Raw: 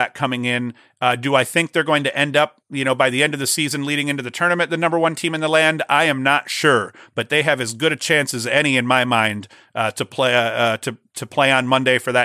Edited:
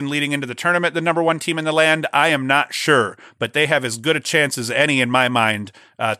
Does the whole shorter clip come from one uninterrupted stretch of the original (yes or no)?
yes